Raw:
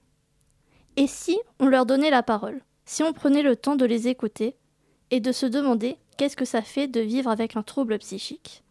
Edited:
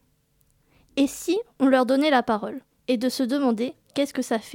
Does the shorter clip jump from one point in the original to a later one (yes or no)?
yes